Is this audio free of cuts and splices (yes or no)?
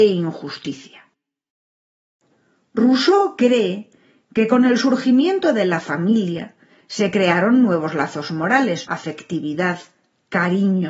no